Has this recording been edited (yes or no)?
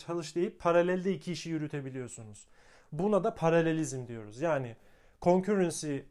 no